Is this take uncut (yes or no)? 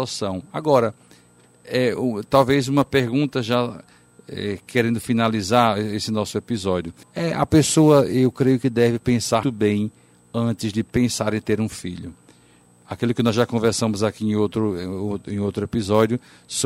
no